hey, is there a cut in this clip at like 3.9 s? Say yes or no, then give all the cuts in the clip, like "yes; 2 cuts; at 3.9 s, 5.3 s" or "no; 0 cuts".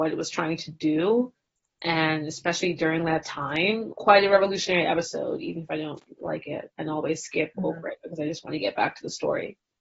yes; 1 cut; at 3.9 s